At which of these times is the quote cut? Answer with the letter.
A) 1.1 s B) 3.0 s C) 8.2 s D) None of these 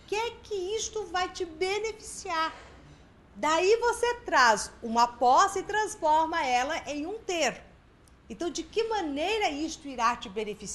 D